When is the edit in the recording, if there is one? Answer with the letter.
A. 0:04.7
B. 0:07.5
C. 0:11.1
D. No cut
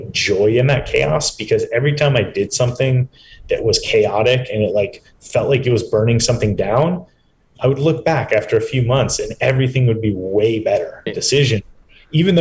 C